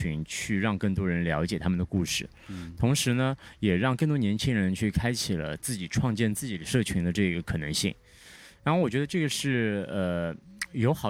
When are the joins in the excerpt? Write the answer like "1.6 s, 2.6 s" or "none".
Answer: none